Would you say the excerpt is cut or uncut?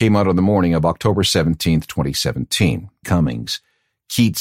cut